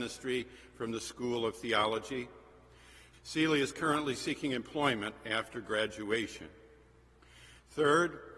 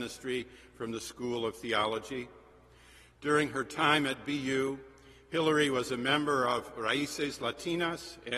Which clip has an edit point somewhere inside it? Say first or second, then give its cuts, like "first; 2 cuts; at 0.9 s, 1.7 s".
first; 1 cut; at 3.1 s